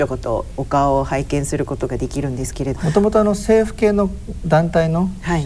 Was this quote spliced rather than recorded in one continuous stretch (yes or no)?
yes